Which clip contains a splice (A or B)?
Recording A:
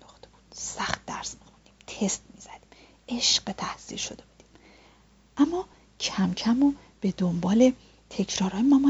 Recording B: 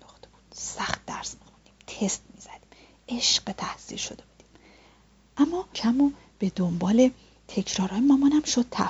B